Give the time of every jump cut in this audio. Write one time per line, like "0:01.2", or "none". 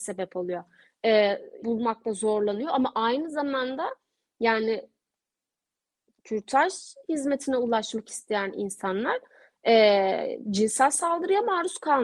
0:01.6